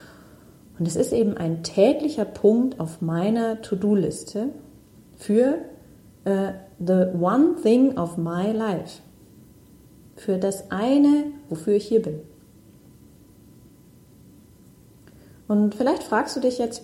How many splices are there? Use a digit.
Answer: 1